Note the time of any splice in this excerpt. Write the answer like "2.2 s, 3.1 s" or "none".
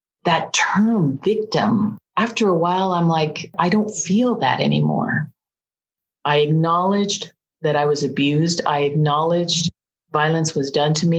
none